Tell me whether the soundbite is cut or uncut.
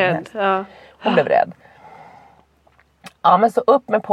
uncut